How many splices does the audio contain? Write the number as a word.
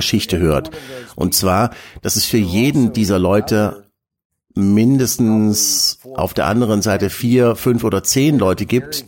zero